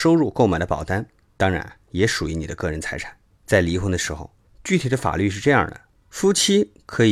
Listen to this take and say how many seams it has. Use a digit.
1